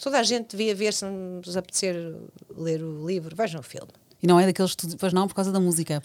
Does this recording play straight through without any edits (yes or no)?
yes